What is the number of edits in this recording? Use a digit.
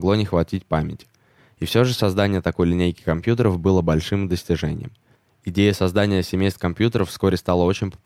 0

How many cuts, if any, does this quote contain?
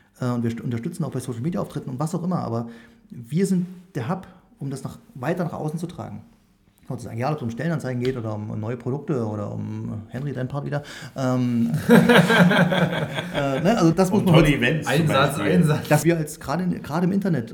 2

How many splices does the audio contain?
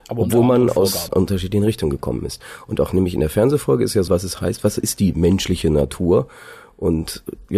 2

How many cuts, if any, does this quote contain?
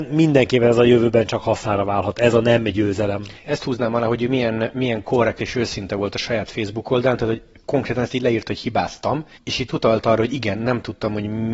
0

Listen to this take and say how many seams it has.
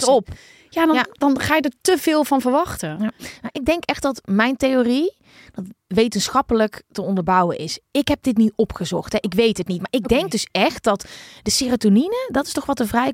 0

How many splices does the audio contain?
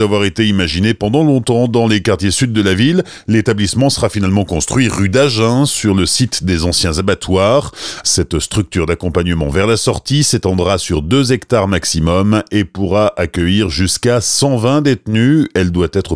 1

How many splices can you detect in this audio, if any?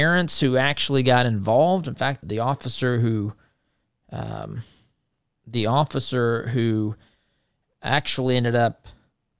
1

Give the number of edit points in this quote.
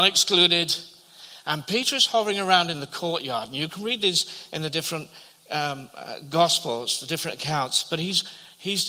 0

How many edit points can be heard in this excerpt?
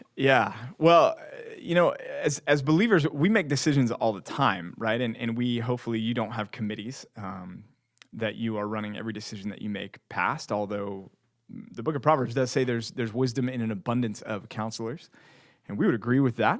0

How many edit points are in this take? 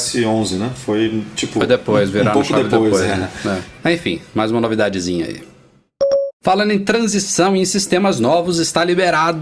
0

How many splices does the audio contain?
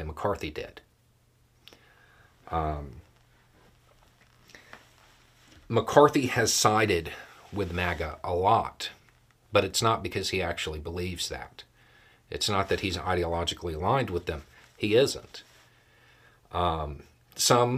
0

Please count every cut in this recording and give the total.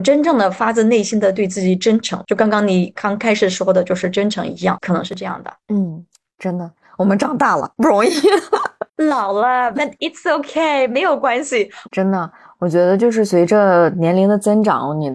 2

